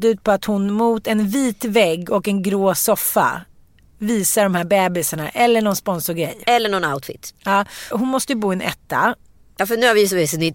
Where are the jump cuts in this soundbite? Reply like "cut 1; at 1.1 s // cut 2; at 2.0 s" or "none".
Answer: cut 1; at 7.9 s